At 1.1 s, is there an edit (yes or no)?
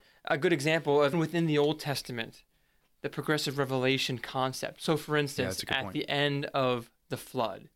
yes